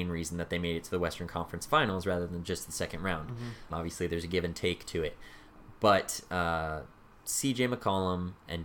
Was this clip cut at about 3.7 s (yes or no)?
yes